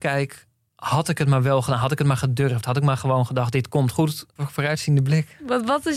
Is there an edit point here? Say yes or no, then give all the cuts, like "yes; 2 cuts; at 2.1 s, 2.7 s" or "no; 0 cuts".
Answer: yes; 1 cut; at 4.4 s